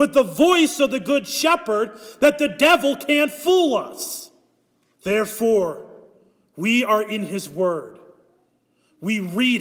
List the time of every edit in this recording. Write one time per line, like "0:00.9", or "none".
0:04.9